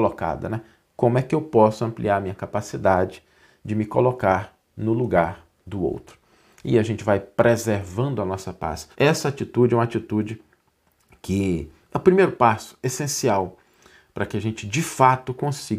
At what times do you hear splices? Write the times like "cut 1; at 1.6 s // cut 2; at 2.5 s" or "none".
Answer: cut 1; at 8.9 s